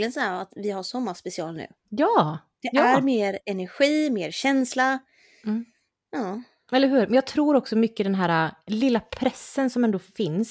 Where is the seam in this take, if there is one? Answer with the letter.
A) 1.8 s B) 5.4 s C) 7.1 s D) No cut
A